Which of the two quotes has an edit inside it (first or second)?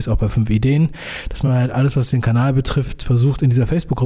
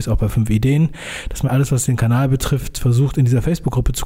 second